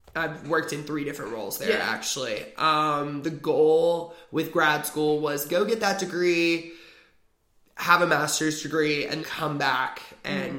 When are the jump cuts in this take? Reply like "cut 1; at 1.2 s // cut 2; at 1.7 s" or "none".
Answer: cut 1; at 9.2 s